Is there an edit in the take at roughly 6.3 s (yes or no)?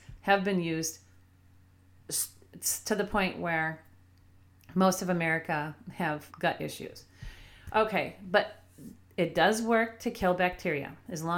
yes